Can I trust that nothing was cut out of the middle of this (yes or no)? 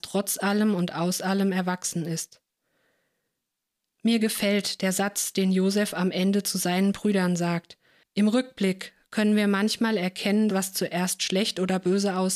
no